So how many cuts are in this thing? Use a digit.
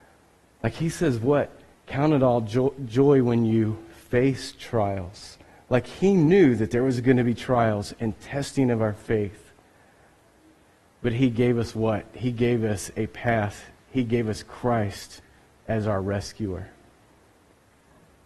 0